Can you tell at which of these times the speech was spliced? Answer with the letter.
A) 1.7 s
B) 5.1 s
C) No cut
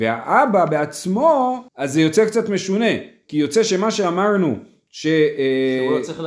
A